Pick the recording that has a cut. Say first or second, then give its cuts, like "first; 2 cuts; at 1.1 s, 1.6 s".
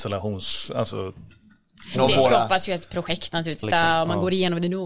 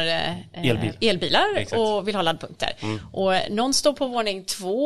first; 2 cuts; at 1.9 s, 3.6 s